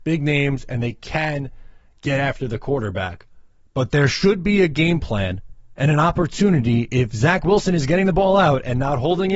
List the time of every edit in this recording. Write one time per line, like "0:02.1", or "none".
none